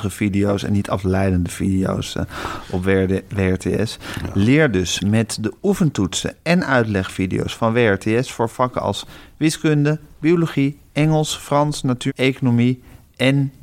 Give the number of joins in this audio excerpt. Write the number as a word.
one